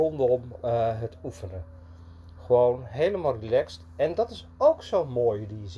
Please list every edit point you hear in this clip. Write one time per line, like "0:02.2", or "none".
none